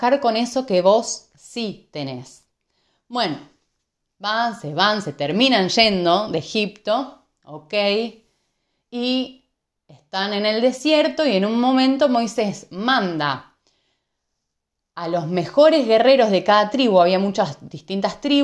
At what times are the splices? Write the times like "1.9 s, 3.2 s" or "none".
none